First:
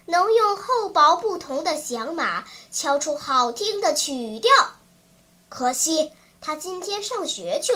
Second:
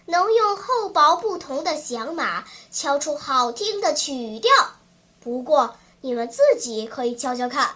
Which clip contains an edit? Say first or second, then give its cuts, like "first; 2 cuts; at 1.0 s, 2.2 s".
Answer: second; 1 cut; at 5.0 s